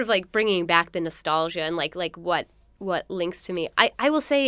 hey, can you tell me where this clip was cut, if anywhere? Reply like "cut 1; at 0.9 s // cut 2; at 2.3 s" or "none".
none